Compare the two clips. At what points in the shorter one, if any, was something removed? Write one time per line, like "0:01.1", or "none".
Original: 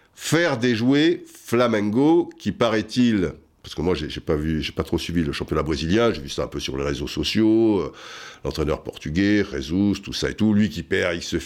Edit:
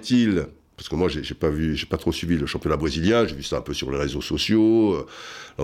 none